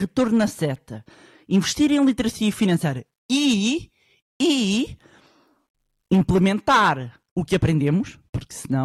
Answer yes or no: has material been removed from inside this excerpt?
yes